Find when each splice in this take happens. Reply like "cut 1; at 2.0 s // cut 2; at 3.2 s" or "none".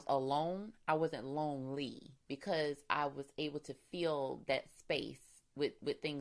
cut 1; at 2.2 s